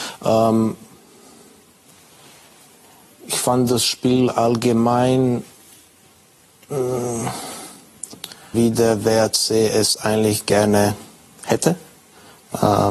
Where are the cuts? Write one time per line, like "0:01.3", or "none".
0:08.5